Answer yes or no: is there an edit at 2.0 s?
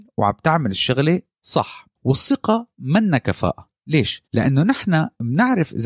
yes